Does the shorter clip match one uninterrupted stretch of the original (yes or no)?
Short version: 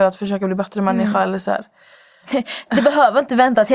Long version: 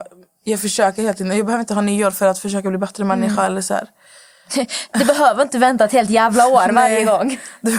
yes